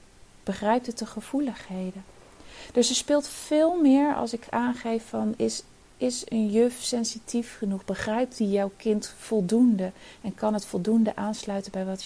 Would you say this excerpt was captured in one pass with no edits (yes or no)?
yes